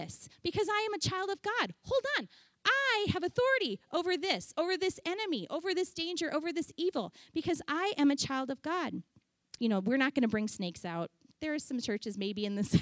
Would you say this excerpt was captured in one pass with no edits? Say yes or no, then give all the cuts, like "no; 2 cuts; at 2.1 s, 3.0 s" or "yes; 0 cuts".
no; 1 cut; at 9.6 s